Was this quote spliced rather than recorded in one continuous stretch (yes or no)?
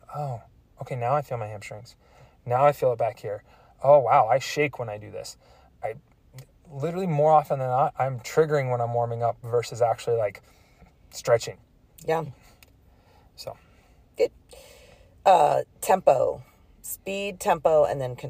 no